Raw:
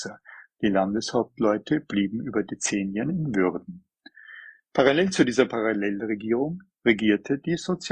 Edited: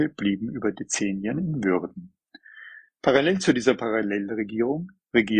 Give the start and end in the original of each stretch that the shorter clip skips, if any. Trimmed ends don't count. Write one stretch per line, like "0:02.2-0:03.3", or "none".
none